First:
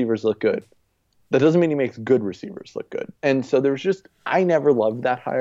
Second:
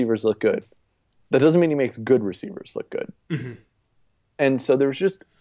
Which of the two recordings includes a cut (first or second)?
first